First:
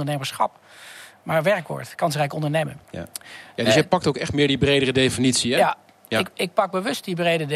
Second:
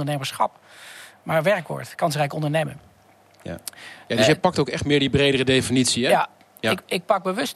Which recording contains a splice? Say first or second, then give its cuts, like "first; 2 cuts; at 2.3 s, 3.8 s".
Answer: first; 1 cut; at 2.8 s